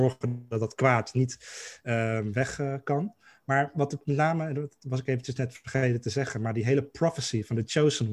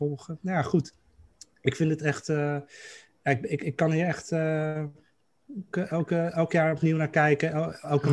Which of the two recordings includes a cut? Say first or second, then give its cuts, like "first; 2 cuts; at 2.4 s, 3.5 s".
second; 1 cut; at 5.7 s